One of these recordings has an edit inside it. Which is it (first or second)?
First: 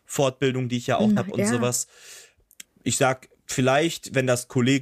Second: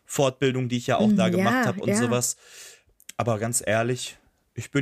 first